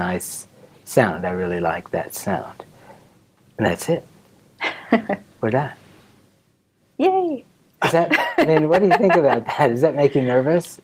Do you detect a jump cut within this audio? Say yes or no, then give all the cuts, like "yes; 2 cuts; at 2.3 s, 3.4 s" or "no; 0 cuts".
no; 0 cuts